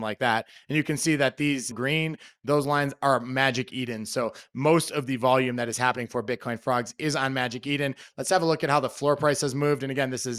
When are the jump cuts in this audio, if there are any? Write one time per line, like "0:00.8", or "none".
0:01.7